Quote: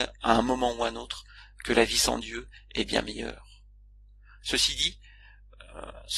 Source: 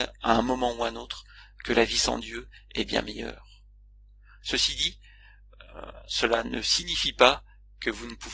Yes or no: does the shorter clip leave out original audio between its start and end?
no